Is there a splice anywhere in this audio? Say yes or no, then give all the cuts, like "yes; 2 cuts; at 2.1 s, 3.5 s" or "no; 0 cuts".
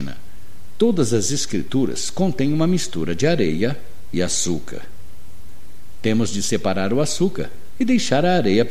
no; 0 cuts